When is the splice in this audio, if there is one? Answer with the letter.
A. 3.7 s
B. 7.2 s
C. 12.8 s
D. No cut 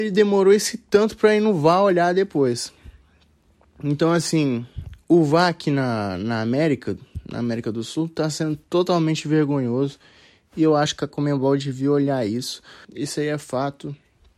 C